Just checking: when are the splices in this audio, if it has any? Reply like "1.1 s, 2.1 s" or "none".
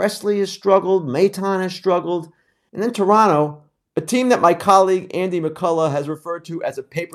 2.7 s